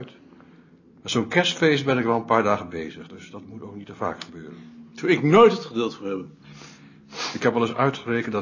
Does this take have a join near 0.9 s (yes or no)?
no